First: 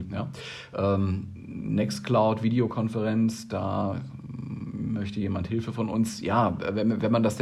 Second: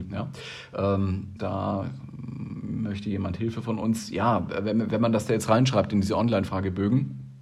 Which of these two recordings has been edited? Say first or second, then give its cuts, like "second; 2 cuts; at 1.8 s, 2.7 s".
second; 1 cut; at 1.4 s